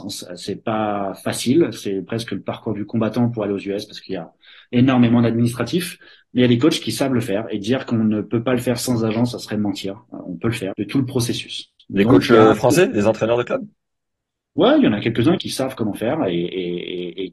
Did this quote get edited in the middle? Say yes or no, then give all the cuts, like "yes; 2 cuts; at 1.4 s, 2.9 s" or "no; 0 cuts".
yes; 2 cuts; at 10.7 s, 15.4 s